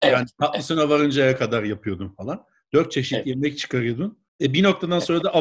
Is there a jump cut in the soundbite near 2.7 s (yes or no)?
no